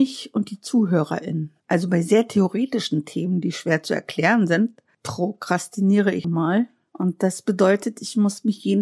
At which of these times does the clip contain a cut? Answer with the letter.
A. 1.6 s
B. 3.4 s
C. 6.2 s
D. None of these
C